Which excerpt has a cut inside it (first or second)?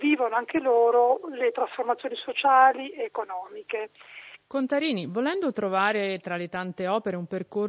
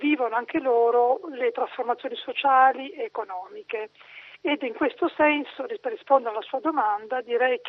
first